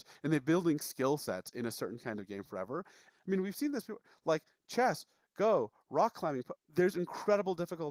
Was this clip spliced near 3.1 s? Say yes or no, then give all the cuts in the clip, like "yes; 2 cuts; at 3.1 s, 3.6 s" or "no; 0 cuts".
yes; 2 cuts; at 3.1 s, 6.6 s